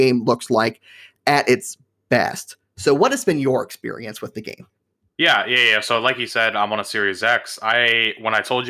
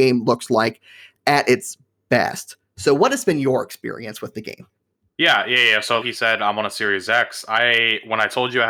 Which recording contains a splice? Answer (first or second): second